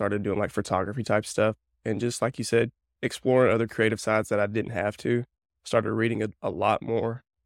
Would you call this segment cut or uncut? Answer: uncut